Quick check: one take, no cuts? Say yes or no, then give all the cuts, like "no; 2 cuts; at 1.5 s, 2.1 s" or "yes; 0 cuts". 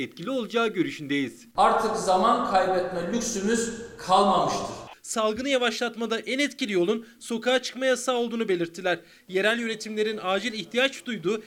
no; 1 cut; at 4.9 s